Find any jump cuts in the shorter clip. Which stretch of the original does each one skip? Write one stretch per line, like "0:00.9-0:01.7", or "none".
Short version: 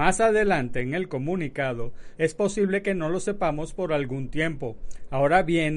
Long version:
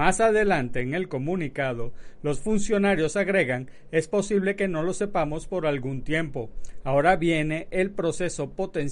0:02.2-0:03.9